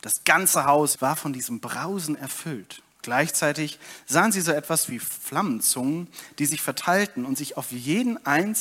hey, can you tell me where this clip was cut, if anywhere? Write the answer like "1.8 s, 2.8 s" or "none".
0.9 s, 2.9 s